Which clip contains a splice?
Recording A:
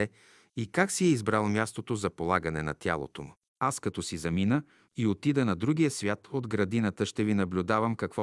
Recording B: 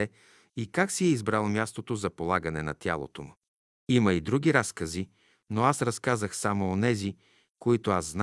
A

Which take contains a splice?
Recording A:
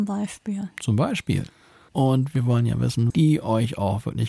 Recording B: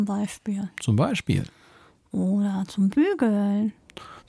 A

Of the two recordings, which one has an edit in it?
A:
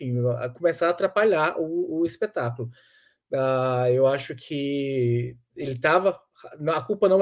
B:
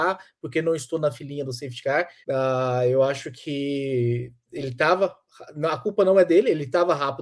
B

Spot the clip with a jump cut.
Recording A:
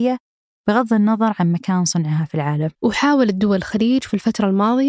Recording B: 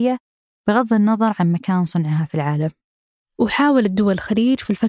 A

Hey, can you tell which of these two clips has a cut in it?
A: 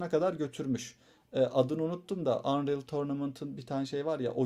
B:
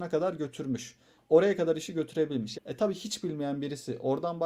B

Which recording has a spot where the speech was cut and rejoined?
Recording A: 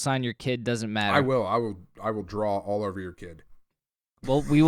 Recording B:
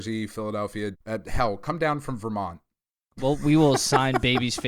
B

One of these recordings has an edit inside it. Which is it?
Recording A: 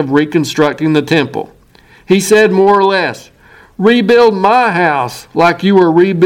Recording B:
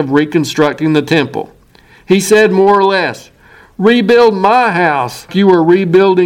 B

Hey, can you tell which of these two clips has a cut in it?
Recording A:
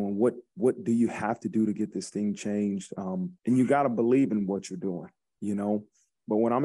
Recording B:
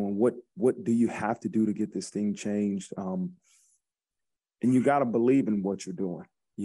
A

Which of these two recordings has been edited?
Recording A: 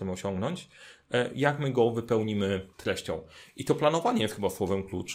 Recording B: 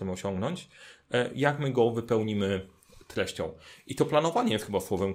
A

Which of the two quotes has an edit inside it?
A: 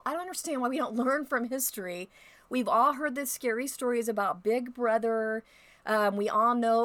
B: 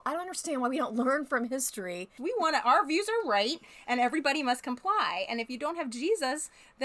B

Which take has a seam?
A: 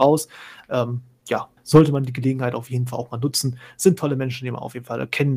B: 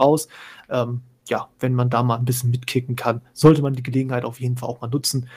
A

